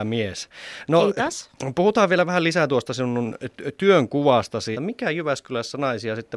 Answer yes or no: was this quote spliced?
yes